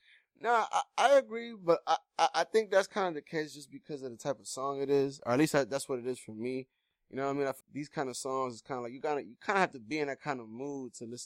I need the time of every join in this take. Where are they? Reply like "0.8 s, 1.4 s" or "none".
7.6 s